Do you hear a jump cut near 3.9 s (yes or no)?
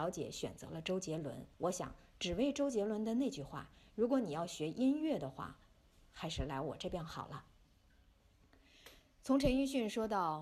no